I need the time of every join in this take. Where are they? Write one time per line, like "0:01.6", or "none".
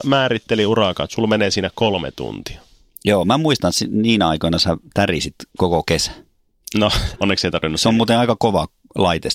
0:05.5
0:07.1